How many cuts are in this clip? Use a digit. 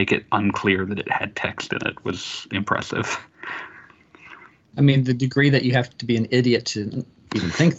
0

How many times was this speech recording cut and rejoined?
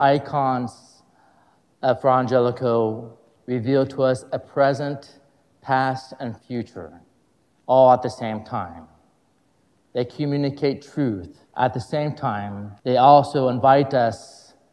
2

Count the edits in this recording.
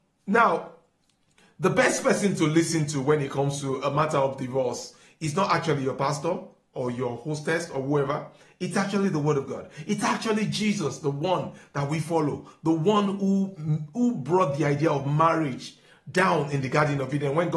0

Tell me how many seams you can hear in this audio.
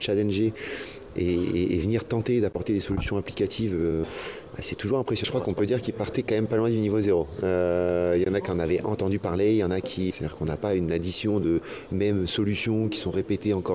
2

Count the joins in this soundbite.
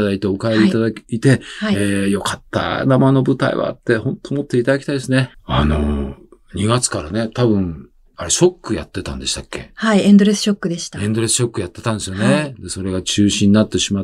1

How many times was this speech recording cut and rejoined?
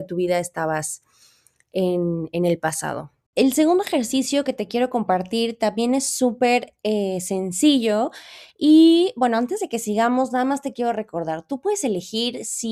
0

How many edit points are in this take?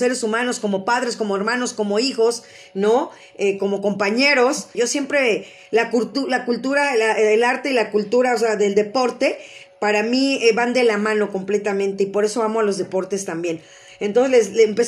1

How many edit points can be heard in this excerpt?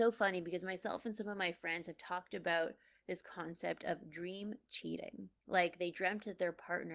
1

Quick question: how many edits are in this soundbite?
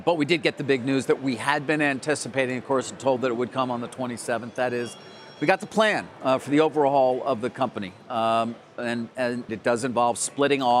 1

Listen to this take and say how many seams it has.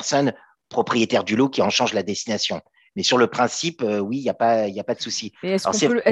0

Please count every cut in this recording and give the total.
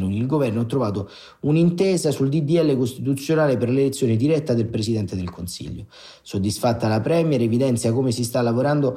0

